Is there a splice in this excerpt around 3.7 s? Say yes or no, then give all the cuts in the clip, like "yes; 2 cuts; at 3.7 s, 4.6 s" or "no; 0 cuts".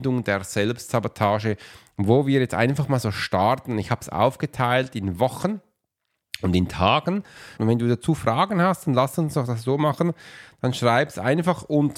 no; 1 cut; at 7.6 s